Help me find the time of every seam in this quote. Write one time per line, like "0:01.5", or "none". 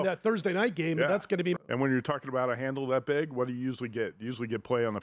0:01.6